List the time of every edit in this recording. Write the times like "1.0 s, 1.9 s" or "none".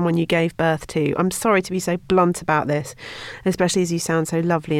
none